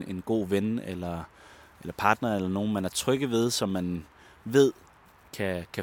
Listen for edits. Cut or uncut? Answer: uncut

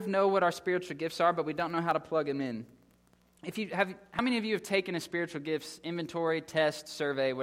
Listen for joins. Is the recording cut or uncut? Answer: uncut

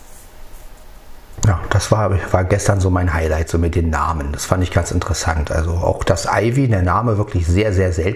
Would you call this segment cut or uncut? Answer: uncut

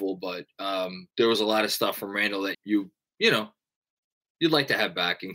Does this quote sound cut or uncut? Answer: cut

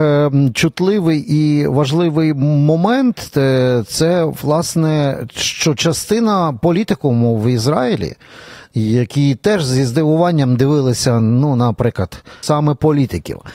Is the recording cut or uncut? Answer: cut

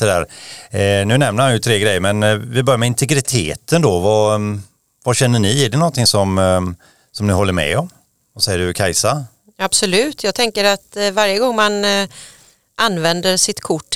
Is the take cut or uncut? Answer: uncut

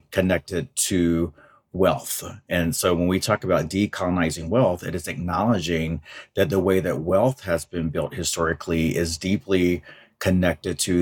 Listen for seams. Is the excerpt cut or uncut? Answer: uncut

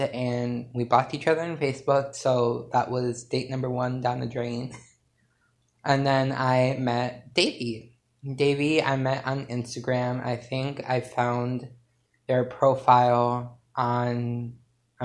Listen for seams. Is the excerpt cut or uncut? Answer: uncut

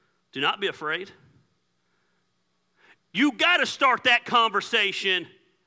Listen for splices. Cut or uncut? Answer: uncut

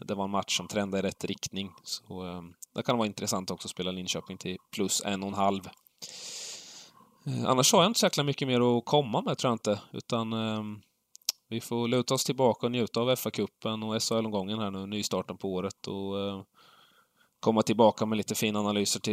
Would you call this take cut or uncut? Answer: uncut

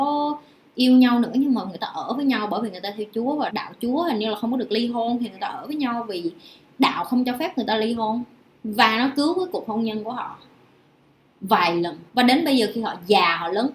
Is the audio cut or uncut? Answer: cut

